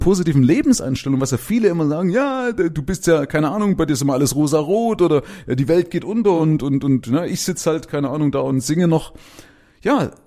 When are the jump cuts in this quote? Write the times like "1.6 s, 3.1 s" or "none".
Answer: none